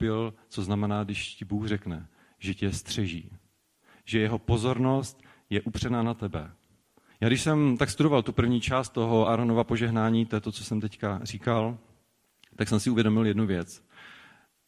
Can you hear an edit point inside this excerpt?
yes; 1 cut; at 7.1 s

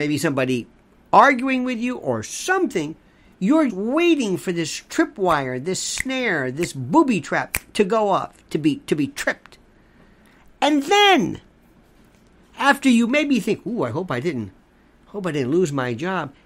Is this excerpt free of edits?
no; 1 cut; at 3.7 s

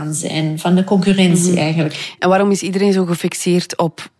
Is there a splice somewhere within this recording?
no; 0 cuts

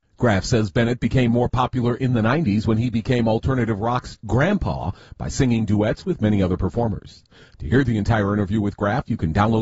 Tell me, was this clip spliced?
no; 0 cuts

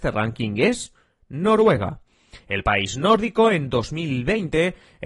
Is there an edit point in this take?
no; 0 cuts

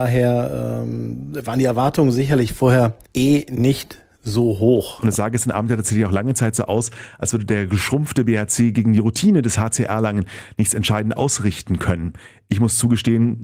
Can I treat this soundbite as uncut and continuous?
no; 1 cut; at 3.0 s

